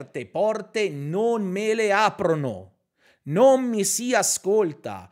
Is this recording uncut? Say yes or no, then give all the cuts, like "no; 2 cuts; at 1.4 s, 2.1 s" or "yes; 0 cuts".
yes; 0 cuts